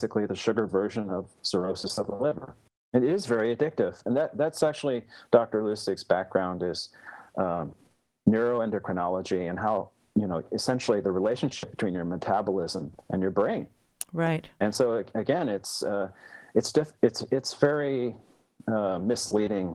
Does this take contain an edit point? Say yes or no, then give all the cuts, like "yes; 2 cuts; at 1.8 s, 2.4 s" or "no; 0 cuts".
no; 0 cuts